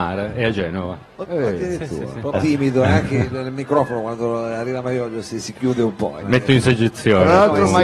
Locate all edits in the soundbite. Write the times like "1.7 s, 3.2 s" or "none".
1.2 s, 2.3 s, 6.2 s